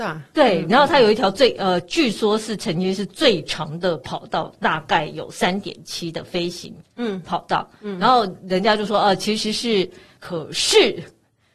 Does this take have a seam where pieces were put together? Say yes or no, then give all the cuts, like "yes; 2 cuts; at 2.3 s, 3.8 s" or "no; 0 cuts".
yes; 1 cut; at 10.2 s